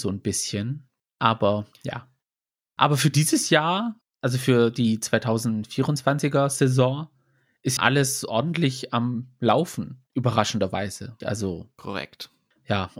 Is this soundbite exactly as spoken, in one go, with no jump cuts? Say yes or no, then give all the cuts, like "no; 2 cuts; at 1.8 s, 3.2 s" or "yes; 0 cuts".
no; 2 cuts; at 7.8 s, 11.2 s